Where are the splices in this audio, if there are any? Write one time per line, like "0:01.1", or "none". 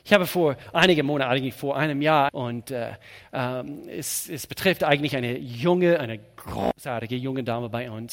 0:02.3